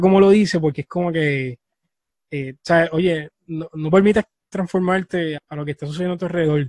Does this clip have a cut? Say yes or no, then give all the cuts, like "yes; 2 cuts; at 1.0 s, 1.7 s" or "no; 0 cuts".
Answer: yes; 2 cuts; at 3.7 s, 5.4 s